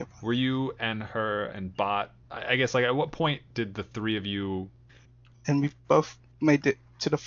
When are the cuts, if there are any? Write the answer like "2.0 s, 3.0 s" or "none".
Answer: 2.2 s, 4.9 s